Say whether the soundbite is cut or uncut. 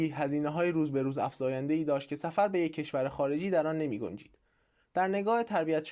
uncut